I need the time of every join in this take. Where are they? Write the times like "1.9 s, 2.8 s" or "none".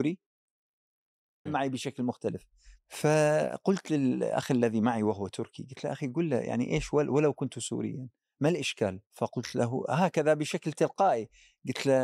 1.5 s, 9.1 s

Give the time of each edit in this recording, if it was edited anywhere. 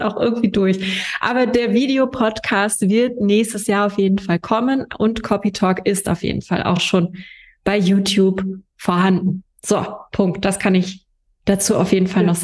none

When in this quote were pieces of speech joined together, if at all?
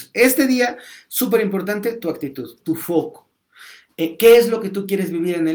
2.6 s

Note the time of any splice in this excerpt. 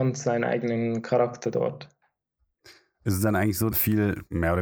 3.7 s

